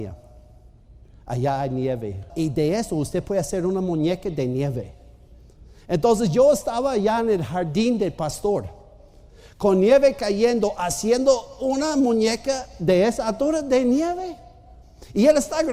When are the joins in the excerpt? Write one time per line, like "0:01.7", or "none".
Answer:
0:02.3